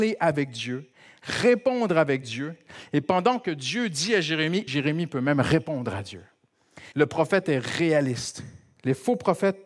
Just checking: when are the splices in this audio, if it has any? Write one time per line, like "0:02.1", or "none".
0:04.7
0:06.9